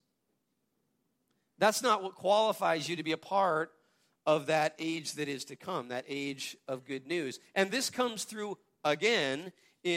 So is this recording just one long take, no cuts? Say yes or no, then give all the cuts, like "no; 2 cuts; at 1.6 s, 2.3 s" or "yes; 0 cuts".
yes; 0 cuts